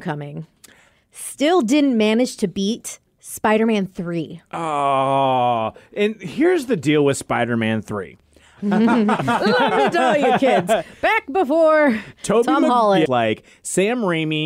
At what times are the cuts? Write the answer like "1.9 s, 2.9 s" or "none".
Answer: 13.1 s